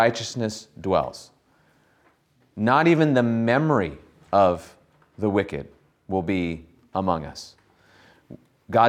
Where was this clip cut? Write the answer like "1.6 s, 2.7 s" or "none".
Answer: none